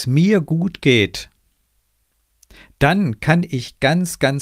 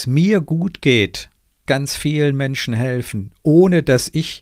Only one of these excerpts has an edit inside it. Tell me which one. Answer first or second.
second